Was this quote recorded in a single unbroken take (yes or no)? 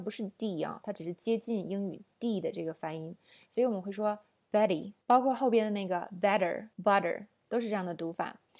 no